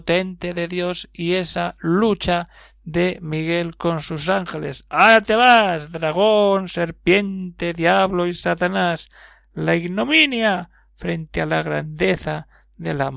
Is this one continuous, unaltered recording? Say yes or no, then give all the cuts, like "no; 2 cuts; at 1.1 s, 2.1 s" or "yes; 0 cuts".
yes; 0 cuts